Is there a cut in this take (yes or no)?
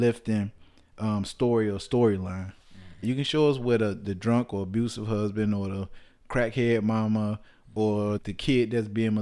yes